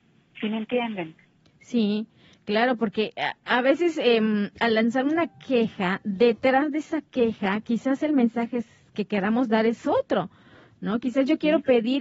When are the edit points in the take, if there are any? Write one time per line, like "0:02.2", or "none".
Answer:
none